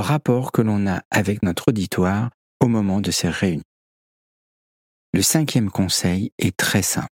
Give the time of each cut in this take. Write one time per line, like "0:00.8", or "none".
0:02.5